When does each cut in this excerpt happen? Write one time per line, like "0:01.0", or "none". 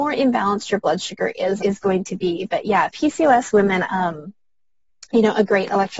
0:01.6
0:03.8